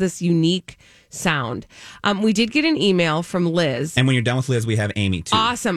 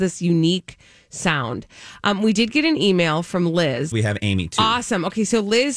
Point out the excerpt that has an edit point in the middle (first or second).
second